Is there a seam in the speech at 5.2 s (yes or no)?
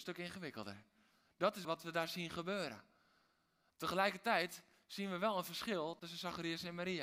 no